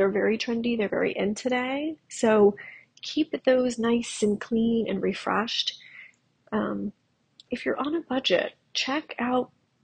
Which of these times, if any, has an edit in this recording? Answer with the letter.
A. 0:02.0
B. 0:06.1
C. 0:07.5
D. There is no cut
C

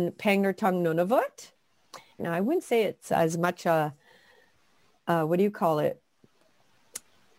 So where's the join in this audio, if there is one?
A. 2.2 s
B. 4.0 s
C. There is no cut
A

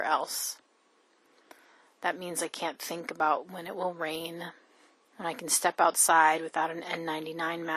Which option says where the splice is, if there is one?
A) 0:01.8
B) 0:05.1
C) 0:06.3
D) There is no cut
B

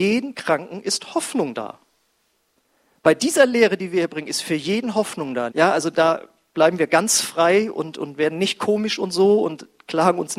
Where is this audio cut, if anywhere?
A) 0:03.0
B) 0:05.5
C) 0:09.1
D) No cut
B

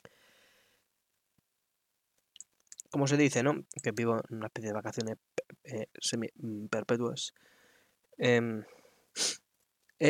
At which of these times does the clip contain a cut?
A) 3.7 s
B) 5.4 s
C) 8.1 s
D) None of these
A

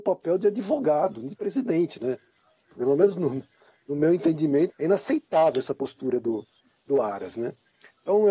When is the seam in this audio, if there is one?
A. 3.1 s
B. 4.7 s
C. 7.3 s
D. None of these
B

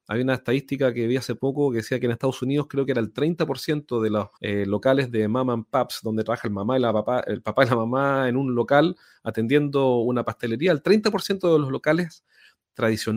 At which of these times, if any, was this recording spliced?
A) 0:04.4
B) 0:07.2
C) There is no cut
A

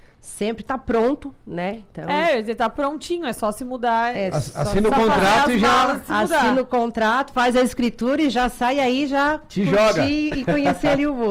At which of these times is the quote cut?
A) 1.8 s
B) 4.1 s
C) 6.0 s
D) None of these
D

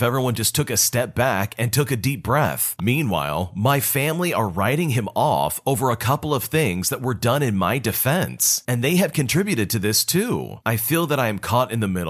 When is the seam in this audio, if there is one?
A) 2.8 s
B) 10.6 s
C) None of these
A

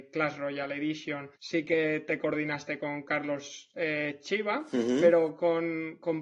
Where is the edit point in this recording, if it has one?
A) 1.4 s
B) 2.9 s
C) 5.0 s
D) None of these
A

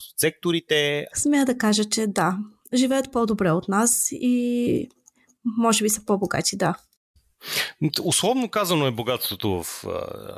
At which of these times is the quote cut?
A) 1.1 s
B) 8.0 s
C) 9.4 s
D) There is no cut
A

